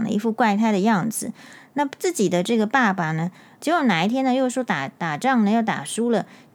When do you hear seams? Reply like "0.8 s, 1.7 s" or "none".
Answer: 3.6 s